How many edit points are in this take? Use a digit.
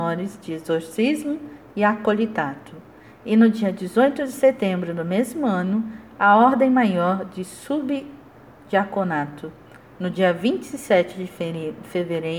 0